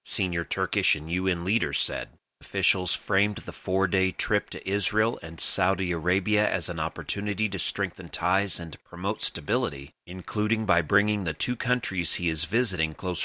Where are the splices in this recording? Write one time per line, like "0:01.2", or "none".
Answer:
0:02.4
0:10.0